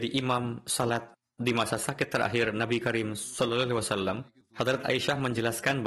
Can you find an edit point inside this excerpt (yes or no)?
yes